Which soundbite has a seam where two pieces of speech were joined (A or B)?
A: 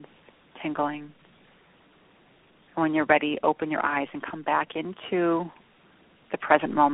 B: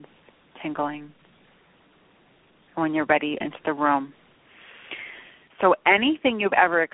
B